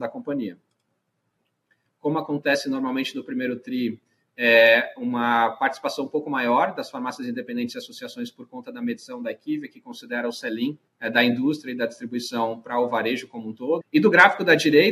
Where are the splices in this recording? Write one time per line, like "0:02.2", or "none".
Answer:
0:01.9
0:10.9
0:13.8